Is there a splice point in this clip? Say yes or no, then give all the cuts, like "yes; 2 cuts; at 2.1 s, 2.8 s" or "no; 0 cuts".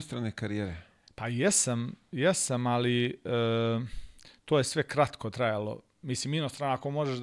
no; 0 cuts